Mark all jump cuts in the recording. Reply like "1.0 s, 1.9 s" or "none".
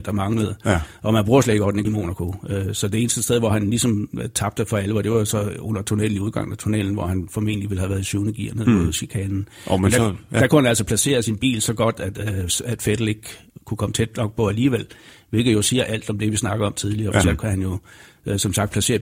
1.8 s, 17.2 s